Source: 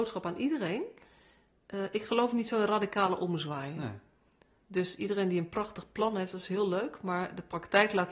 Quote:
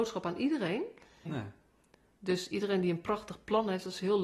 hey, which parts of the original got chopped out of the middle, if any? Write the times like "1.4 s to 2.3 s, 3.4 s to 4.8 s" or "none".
1.3 s to 3.7 s